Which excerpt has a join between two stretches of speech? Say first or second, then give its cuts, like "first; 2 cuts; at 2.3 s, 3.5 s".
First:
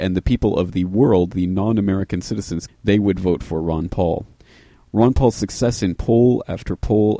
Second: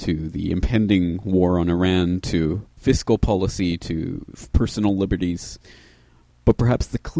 first; 1 cut; at 2.7 s